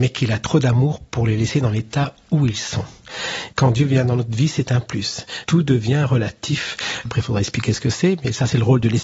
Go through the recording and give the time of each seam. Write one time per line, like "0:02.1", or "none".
0:05.4
0:07.1